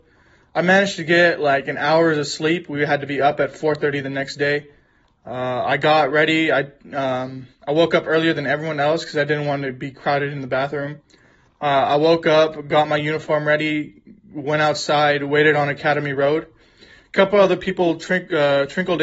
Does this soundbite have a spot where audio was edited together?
no; 0 cuts

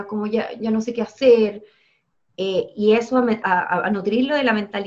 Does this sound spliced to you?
yes; 1 cut; at 3.4 s

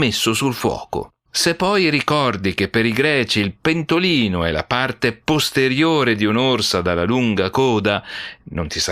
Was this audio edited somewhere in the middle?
yes; 1 cut; at 1.3 s

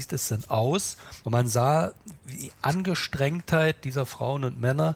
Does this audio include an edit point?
yes; 1 cut; at 1.2 s

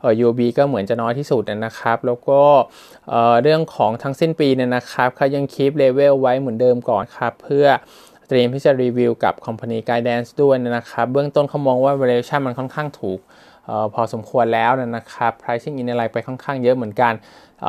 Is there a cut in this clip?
yes; 1 cut; at 7.0 s

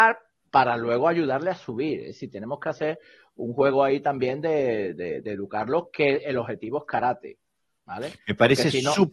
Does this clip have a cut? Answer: no; 0 cuts

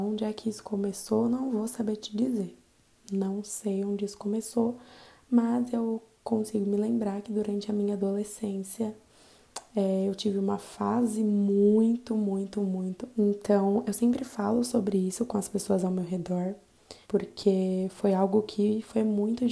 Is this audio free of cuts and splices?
no; 2 cuts; at 13.1 s, 17.0 s

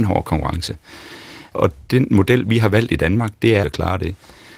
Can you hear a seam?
yes; 2 cuts; at 1.5 s, 3.6 s

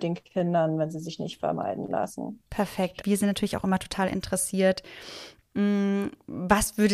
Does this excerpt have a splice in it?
yes; 1 cut; at 3.0 s

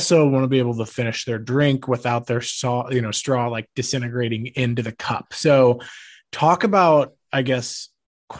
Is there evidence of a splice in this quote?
no; 0 cuts

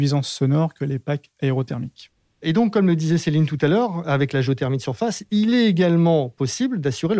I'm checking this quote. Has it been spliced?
no; 0 cuts

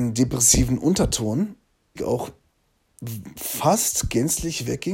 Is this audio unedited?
no; 1 cut; at 2.0 s

